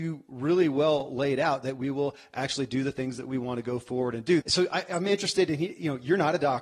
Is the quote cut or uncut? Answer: cut